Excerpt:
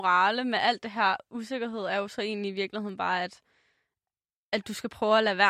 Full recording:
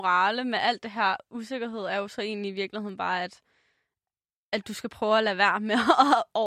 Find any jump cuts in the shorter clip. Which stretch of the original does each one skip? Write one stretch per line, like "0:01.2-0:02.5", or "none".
none